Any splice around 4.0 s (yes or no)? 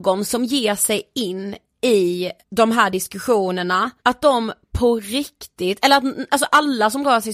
yes